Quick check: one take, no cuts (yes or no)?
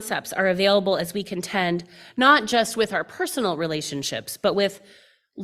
yes